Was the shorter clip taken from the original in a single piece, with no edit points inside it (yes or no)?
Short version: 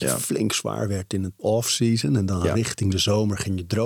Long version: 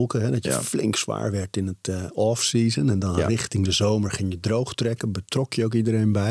no